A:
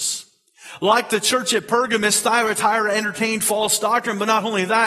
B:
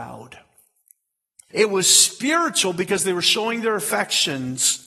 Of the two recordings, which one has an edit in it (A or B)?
B